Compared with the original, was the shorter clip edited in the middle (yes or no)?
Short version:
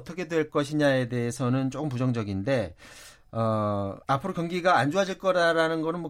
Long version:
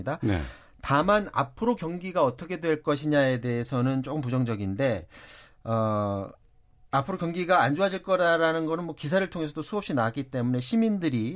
yes